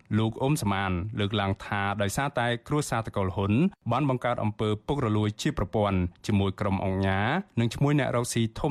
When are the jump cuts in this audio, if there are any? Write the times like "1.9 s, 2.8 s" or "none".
none